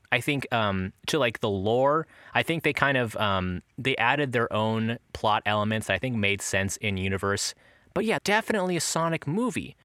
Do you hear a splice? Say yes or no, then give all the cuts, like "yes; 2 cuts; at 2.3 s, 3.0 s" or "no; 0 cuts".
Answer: yes; 1 cut; at 8.2 s